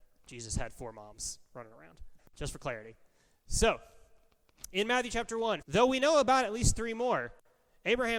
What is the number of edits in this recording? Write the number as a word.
two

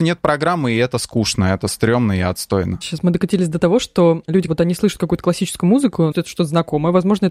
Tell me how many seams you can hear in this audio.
two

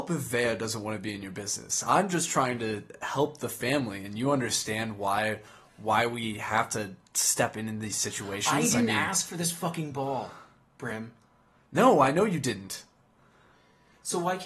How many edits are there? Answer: zero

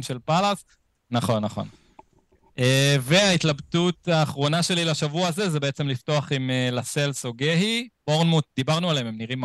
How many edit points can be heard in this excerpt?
one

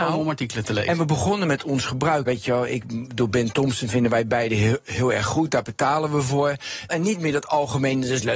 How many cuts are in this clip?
two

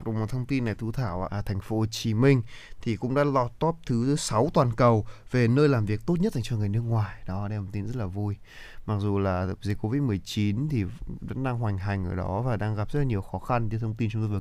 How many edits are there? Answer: one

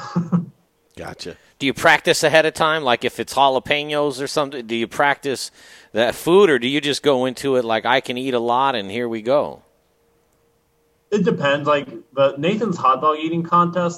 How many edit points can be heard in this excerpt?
zero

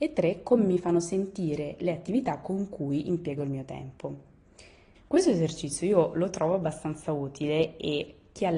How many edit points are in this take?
one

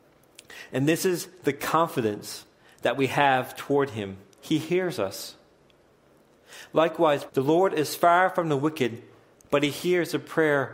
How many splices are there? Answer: two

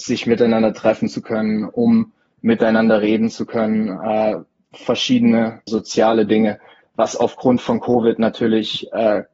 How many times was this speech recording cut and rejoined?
one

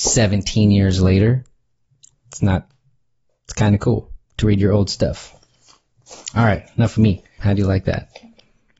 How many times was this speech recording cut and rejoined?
three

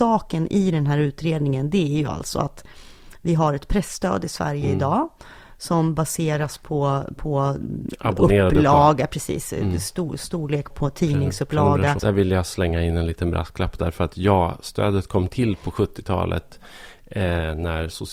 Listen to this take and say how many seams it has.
two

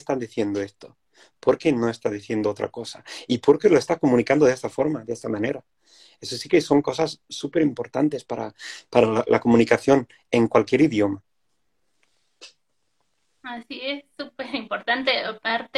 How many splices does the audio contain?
zero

